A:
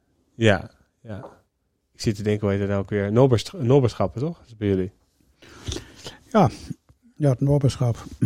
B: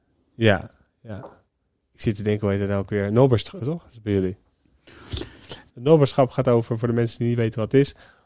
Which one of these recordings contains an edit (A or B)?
B